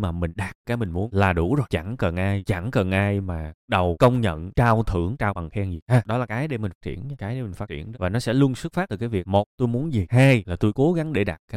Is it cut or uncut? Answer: uncut